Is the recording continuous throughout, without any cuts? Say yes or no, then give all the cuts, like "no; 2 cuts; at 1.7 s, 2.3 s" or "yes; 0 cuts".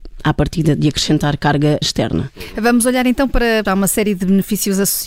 no; 2 cuts; at 1.8 s, 3.6 s